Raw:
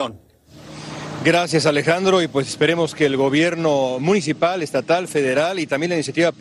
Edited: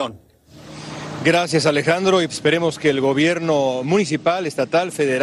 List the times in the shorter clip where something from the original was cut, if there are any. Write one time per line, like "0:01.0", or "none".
0:02.3